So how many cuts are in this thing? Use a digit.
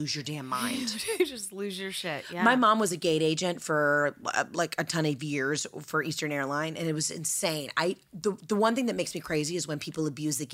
0